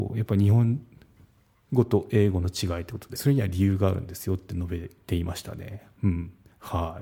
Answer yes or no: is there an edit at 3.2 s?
yes